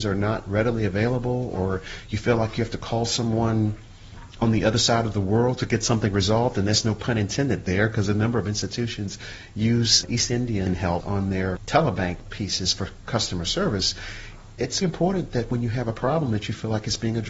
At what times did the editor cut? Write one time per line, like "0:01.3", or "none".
0:14.8